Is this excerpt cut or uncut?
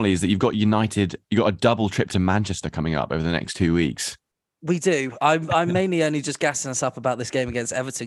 uncut